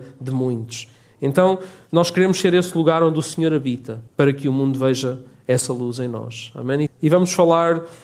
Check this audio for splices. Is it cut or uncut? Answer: cut